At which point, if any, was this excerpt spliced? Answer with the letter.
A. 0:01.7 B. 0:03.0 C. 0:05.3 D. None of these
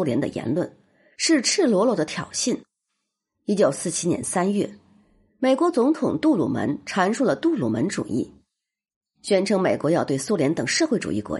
D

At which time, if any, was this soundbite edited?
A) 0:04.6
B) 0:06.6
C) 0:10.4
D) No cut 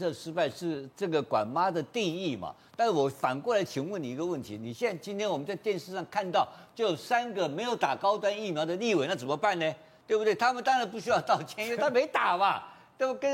D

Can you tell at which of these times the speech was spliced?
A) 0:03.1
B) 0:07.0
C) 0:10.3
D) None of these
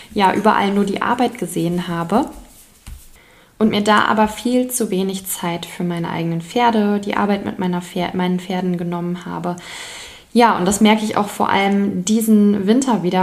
D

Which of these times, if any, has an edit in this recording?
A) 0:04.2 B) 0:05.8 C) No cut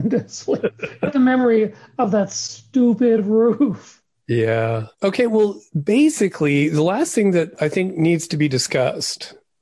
C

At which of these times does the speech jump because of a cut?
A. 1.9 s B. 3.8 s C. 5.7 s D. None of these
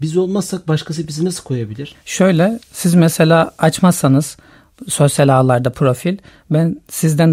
A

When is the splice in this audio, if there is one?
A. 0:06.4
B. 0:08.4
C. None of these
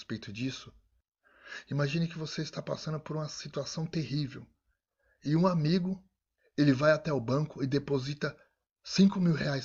A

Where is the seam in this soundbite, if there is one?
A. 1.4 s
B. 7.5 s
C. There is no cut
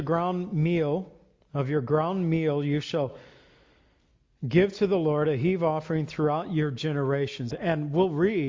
B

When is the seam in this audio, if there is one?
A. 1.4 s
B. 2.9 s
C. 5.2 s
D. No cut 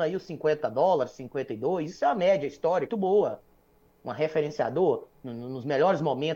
B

